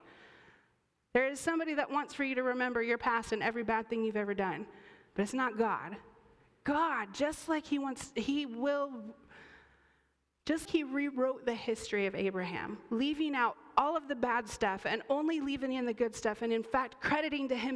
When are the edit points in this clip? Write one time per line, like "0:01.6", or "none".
0:10.7